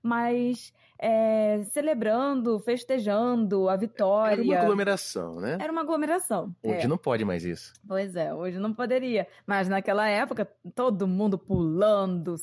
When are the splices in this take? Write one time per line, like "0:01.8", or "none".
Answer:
none